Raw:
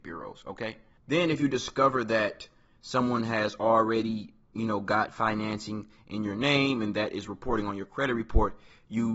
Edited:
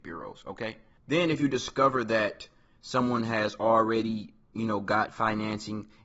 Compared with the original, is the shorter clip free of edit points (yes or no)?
yes